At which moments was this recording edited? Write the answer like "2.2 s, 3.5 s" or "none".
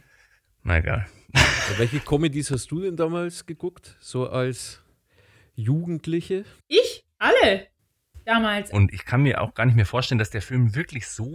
7.1 s, 8.7 s

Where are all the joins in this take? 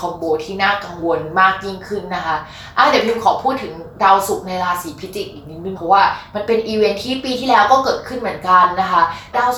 none

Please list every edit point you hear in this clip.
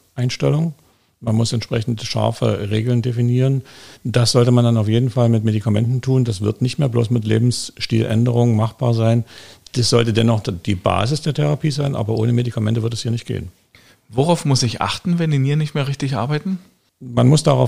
none

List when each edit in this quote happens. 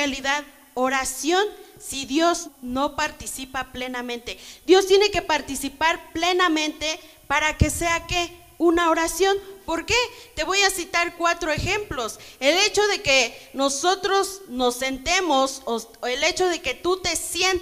2.4 s

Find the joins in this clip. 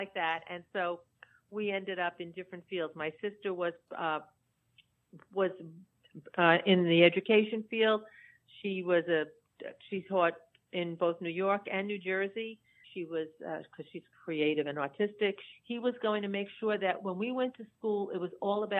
12.8 s, 15.5 s

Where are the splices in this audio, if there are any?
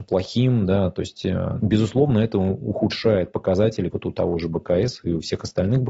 1.6 s, 3.9 s

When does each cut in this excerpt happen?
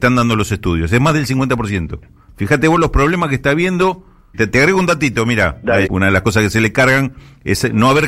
4.3 s, 5.9 s

